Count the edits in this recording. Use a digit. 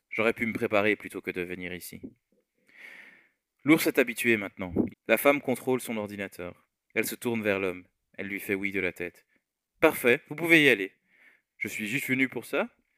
1